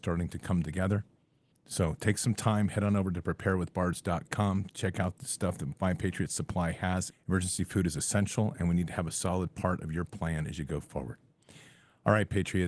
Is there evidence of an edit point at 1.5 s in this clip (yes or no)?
yes